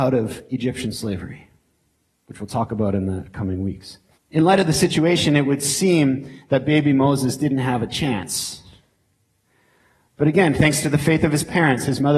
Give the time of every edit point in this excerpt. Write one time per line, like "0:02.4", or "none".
0:04.1